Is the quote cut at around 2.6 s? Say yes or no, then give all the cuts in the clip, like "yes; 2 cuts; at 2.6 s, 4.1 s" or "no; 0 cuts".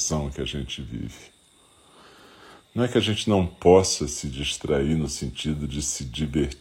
yes; 1 cut; at 2.6 s